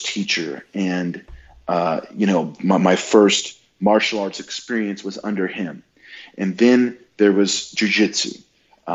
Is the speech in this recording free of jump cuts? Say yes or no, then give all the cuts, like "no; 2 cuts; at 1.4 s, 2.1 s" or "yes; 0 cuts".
yes; 0 cuts